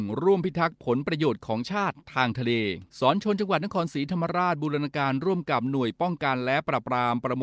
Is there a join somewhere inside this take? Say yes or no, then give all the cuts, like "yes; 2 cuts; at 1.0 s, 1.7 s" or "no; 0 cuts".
yes; 1 cut; at 2.9 s